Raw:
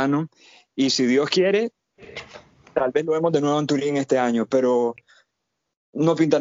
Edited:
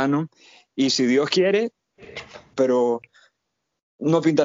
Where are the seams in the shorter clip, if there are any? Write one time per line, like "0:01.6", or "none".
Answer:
0:02.5